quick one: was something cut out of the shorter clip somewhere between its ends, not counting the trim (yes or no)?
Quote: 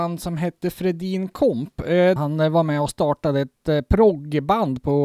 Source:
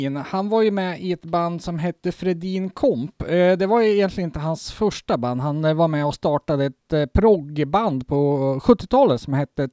yes